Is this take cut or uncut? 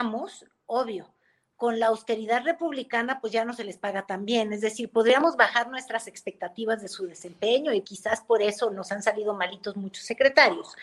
cut